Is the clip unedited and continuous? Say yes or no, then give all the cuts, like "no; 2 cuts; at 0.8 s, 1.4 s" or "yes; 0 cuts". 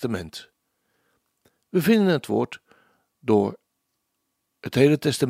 yes; 0 cuts